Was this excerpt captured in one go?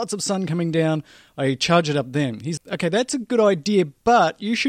no; 1 cut; at 2.6 s

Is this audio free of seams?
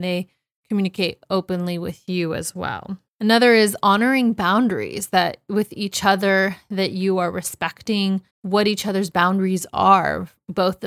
no; 2 cuts; at 3.1 s, 8.3 s

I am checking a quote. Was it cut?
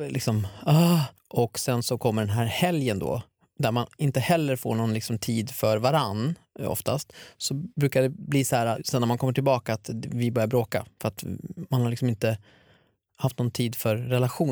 yes; 1 cut; at 1.2 s

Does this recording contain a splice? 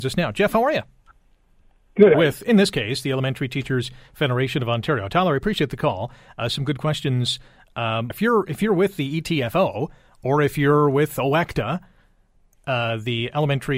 yes; 2 cuts; at 2.1 s, 8.1 s

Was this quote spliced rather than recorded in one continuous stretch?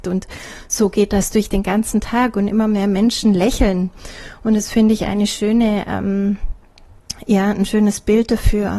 no; 0 cuts

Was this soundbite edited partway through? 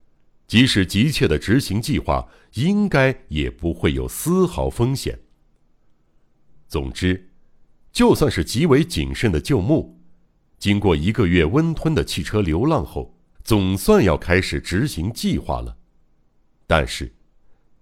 yes; 1 cut; at 13.4 s

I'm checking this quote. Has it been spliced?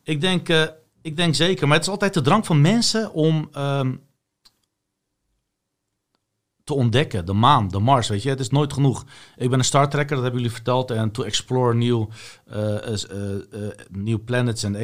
no; 0 cuts

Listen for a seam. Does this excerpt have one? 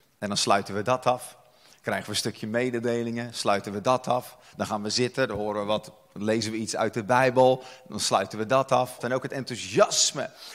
yes; 1 cut; at 9.0 s

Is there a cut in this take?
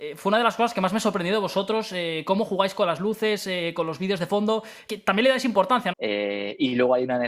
yes; 2 cuts; at 4.9 s, 5.9 s

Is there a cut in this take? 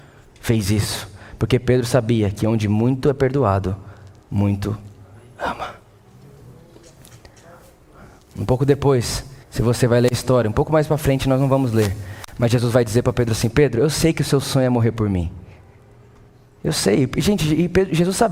yes; 1 cut; at 9.4 s

